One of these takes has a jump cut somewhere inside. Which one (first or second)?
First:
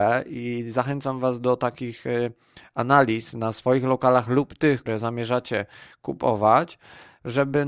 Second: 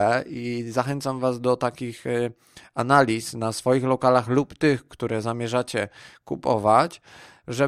first